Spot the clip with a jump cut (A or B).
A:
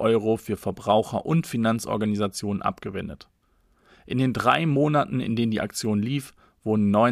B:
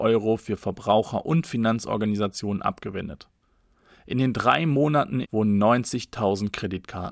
B